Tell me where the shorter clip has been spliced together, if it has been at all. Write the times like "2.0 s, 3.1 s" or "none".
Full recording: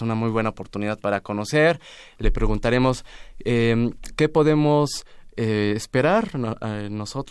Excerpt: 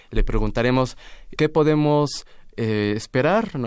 1.4 s